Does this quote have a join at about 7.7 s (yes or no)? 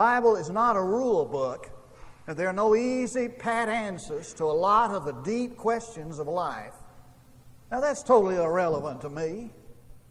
yes